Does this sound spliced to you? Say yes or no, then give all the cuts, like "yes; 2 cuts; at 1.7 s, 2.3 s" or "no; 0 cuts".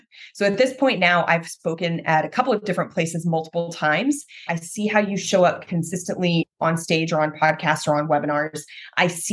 yes; 2 cuts; at 4.5 s, 6.5 s